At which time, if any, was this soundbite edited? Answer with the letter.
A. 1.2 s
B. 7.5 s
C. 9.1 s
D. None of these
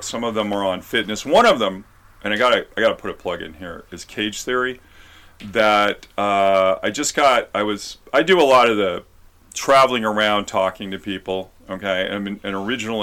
D